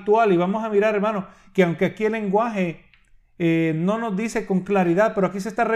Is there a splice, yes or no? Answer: no